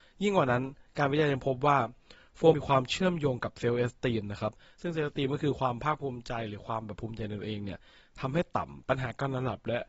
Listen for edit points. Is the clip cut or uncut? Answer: cut